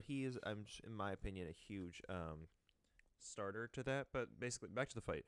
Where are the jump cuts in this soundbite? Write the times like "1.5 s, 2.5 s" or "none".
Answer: none